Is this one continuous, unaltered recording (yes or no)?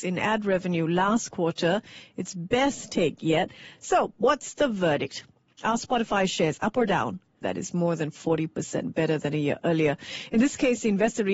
no